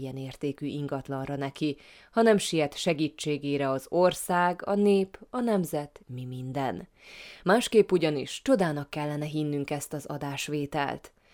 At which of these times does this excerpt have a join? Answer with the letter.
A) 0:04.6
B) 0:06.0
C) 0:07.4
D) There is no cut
B